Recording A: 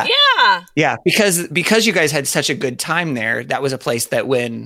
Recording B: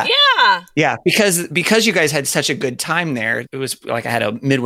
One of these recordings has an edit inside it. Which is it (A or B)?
B